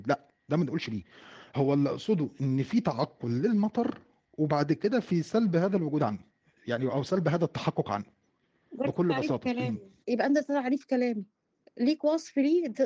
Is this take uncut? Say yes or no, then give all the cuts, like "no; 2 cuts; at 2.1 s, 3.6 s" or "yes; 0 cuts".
no; 1 cut; at 10.0 s